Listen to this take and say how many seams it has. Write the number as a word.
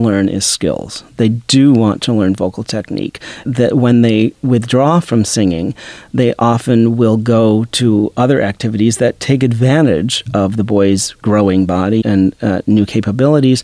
two